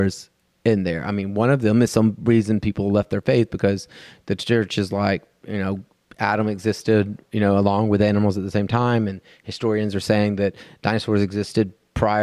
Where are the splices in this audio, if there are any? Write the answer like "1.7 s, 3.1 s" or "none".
none